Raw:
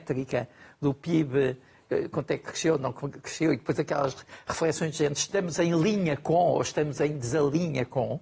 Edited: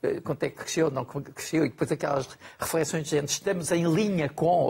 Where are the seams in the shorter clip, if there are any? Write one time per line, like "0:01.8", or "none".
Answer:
none